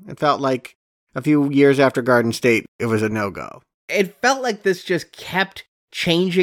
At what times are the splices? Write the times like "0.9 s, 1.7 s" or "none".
none